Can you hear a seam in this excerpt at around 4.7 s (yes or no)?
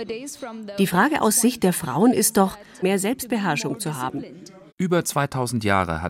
yes